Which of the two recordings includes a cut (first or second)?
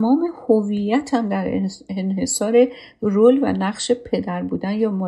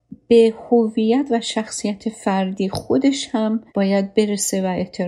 second